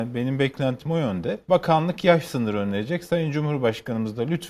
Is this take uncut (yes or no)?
no